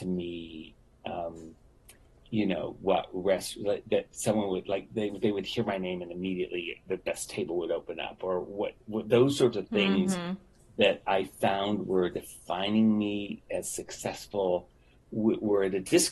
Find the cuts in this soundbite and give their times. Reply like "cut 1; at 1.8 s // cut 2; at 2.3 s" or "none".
none